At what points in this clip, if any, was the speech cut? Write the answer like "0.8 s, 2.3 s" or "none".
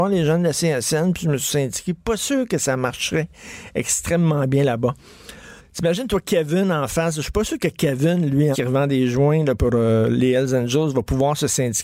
5.6 s, 8.5 s, 9.6 s